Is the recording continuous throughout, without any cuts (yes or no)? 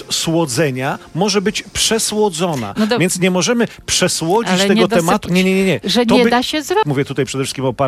no